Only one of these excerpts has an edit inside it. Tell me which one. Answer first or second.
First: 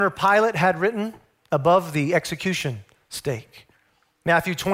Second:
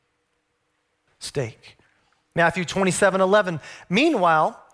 second